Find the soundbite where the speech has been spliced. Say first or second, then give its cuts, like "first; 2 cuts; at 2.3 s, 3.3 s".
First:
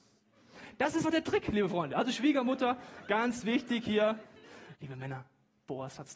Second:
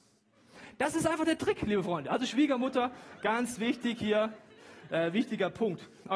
first; 2 cuts; at 1.0 s, 4.7 s